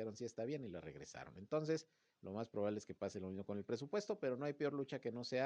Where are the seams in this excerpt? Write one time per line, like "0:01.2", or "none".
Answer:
none